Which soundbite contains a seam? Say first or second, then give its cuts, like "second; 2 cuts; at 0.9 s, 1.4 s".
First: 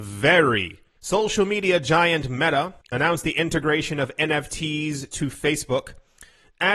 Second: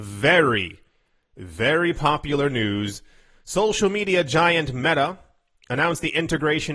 first; 2 cuts; at 1.0 s, 2.8 s